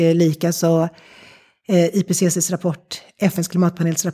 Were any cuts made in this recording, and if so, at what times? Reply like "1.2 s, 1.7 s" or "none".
none